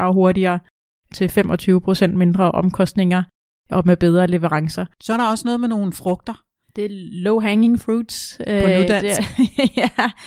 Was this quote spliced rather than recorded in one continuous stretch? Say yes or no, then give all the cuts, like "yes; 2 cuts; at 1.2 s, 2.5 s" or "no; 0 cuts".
yes; 2 cuts; at 5.0 s, 6.6 s